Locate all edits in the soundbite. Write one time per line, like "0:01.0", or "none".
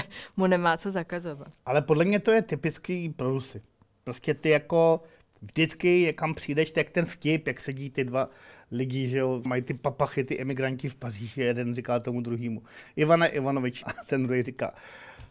0:09.5
0:13.8